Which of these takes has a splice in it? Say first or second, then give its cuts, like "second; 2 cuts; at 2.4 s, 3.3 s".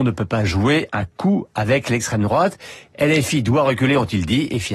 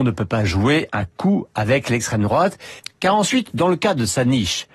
second; 1 cut; at 2.8 s